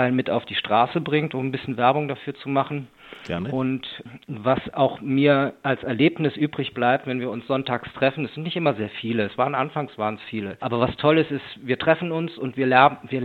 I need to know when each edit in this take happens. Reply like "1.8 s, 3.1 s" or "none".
none